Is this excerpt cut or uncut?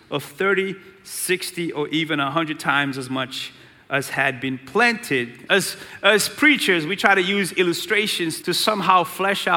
cut